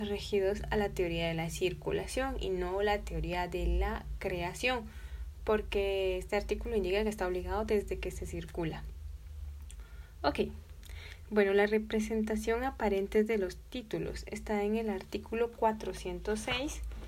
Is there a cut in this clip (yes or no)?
yes